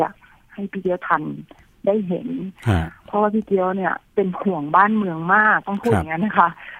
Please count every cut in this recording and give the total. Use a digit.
1